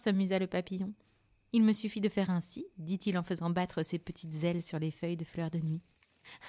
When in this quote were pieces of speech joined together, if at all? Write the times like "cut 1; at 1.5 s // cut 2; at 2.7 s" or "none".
none

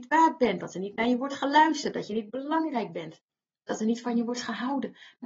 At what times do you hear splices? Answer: none

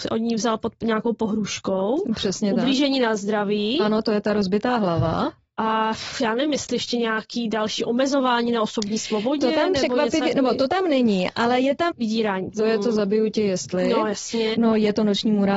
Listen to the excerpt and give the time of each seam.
cut 1; at 11.9 s // cut 2; at 14.5 s

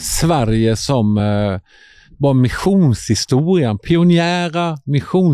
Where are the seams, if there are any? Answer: none

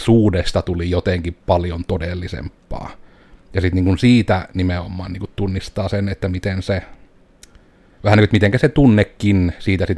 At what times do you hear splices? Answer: none

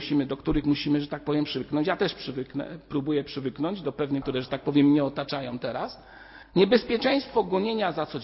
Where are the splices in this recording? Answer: cut 1; at 4.2 s // cut 2; at 6.4 s

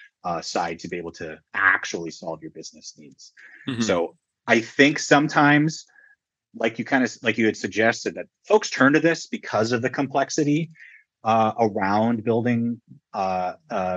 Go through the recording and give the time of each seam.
none

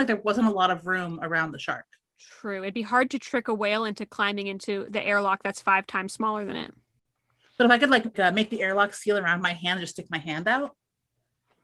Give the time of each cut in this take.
cut 1; at 8.1 s

